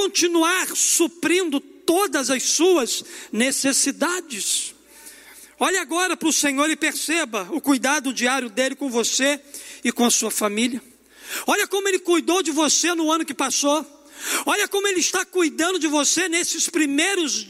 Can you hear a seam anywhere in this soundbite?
no; 0 cuts

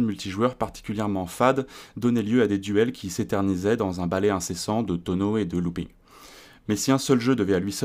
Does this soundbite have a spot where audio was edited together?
no; 0 cuts

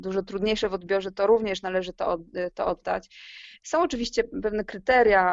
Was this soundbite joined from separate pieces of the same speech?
no; 0 cuts

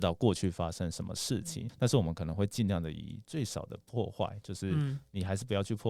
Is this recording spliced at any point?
yes; 1 cut; at 1.7 s

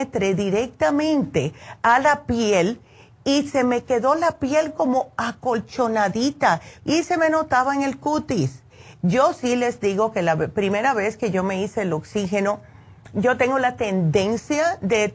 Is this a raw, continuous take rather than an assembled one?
no; 2 cuts; at 6.8 s, 8.9 s

